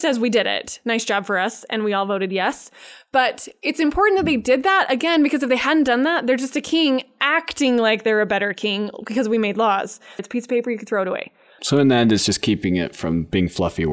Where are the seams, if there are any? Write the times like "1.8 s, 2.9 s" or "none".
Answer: 10.2 s, 11.6 s